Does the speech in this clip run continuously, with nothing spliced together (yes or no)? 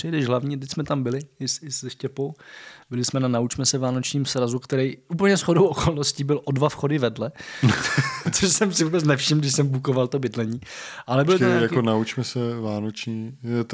yes